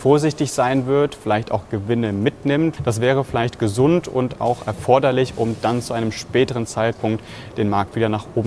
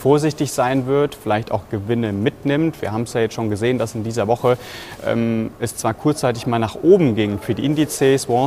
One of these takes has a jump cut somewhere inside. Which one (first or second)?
first